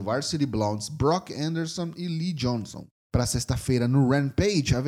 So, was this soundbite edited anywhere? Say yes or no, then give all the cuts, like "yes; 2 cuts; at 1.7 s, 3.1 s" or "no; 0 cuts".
yes; 1 cut; at 3.0 s